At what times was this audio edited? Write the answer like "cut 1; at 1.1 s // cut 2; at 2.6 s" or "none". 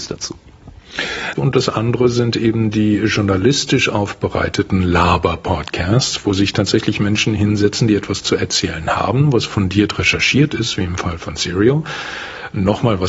cut 1; at 1.4 s

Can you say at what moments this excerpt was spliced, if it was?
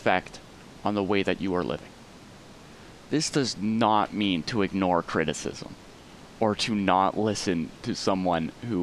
none

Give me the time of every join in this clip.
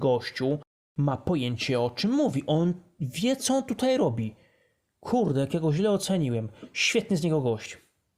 none

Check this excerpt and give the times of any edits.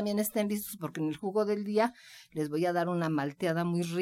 none

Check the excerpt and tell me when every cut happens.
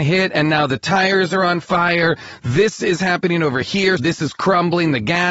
cut 1; at 4.0 s

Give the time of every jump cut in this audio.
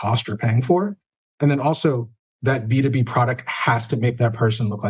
cut 1; at 2.2 s

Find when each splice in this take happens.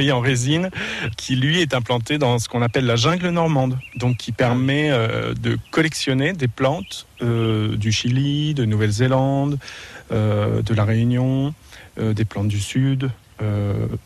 cut 1; at 1.1 s

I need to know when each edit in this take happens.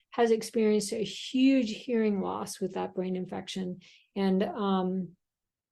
none

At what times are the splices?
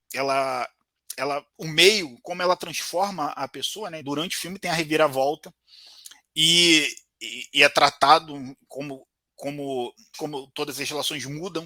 cut 1; at 4.0 s // cut 2; at 8.7 s // cut 3; at 10.1 s

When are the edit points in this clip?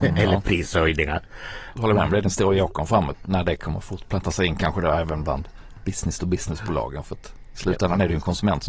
cut 1; at 1.7 s // cut 2; at 3.1 s

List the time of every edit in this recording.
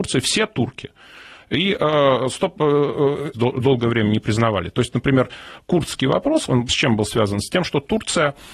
cut 1; at 3.3 s

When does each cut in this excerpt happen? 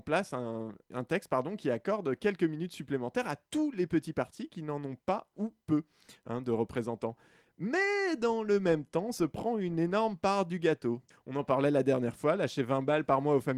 cut 1; at 11.1 s

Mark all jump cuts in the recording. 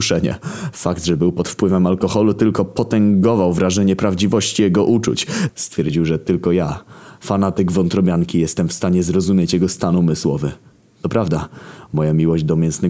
cut 1; at 5.5 s

